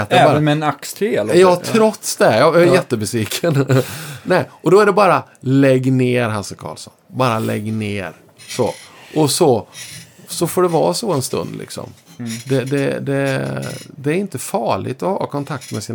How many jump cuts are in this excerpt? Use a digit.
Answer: 0